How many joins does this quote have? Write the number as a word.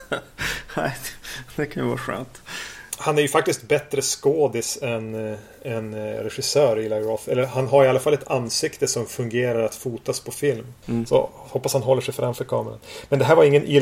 zero